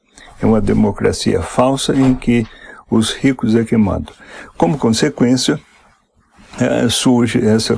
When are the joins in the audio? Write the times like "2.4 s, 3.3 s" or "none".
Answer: none